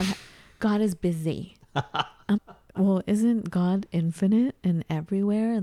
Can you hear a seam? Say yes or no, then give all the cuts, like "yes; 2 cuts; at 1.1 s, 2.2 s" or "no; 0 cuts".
yes; 1 cut; at 2.4 s